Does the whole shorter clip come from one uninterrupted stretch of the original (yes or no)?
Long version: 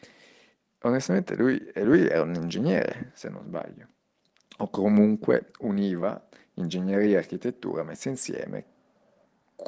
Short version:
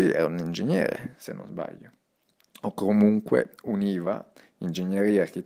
yes